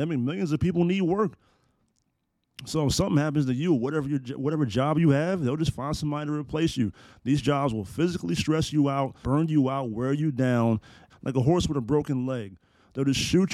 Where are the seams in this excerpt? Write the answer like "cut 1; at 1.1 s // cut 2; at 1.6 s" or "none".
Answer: cut 1; at 9.2 s // cut 2; at 11.1 s